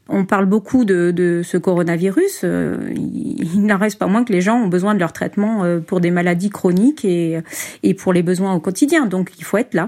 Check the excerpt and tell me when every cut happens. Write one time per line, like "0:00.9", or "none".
none